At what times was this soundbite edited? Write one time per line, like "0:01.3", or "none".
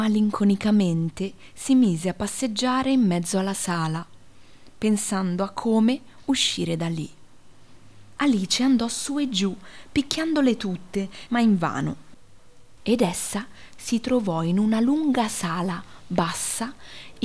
0:08.2
0:11.3
0:12.8